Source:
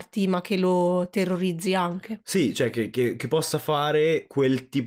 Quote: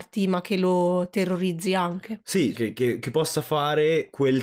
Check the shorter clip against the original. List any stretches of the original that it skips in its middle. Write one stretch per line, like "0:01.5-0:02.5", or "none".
0:02.5-0:02.7